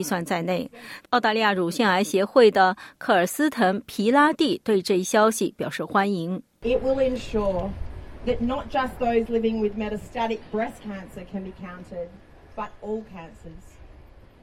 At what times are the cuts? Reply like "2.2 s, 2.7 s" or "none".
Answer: 1.0 s